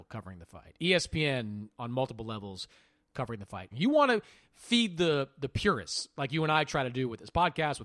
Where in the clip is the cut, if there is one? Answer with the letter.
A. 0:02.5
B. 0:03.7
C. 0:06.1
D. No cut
B